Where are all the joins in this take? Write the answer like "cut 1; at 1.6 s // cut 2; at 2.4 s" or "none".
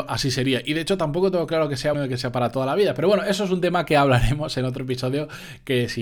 cut 1; at 1.9 s

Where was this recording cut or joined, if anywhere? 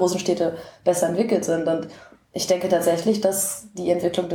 none

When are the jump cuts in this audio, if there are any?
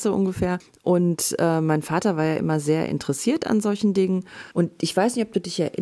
cut 1; at 4.5 s

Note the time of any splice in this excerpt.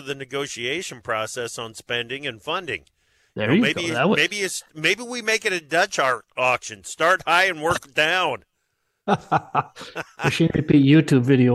none

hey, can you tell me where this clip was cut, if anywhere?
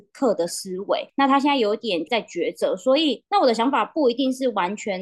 cut 1; at 3.3 s

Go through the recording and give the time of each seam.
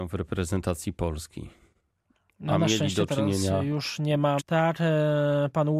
cut 1; at 4.4 s

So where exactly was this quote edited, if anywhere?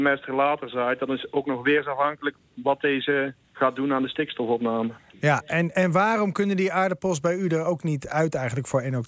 cut 1; at 3.4 s

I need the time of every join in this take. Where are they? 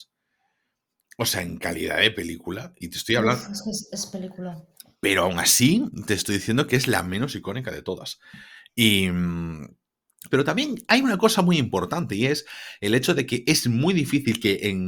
cut 1; at 10.3 s

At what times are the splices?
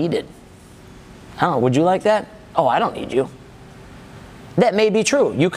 none

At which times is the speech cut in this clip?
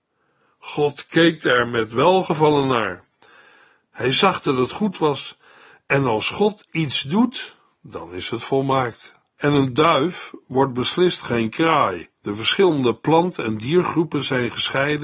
cut 1; at 9.3 s // cut 2; at 12.1 s

